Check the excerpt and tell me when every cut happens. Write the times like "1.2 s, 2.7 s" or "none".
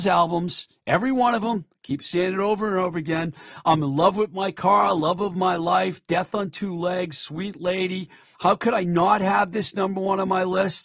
8.3 s